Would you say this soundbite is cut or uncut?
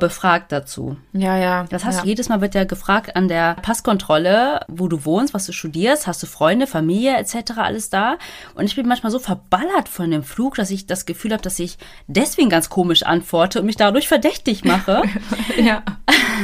cut